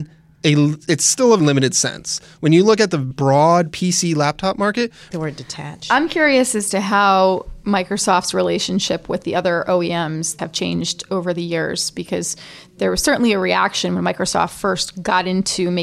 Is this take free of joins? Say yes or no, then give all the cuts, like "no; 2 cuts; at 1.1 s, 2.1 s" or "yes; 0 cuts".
no; 3 cuts; at 1.4 s, 5.1 s, 10.4 s